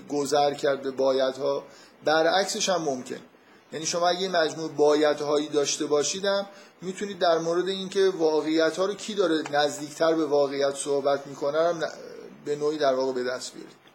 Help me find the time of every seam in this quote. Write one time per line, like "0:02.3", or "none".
none